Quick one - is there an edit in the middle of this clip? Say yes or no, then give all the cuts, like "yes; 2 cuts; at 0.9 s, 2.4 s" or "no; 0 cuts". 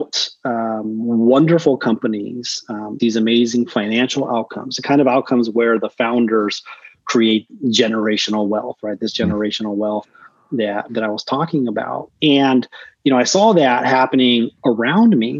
yes; 2 cuts; at 3.0 s, 10.9 s